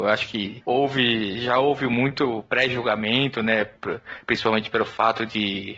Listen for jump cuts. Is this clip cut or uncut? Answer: uncut